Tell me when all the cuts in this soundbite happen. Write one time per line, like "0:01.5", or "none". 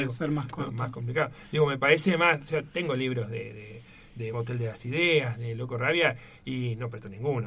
none

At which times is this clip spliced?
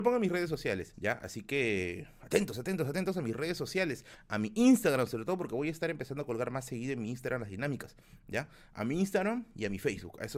0:00.9

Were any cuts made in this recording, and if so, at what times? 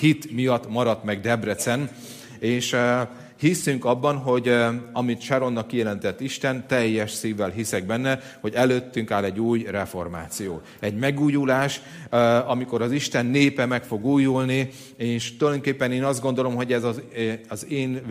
none

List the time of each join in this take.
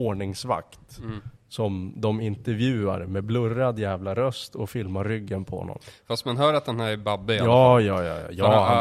none

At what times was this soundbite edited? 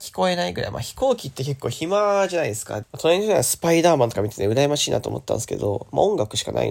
0:02.8

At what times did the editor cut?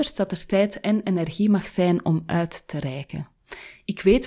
none

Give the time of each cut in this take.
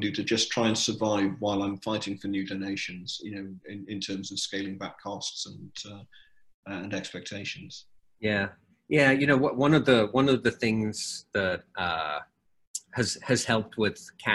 none

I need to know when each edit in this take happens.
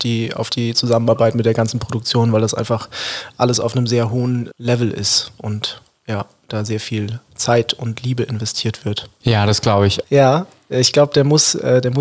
0:10.0

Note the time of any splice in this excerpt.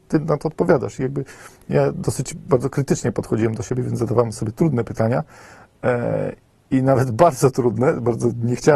none

